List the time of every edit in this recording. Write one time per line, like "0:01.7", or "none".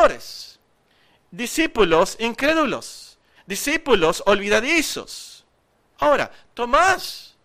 0:03.3
0:05.9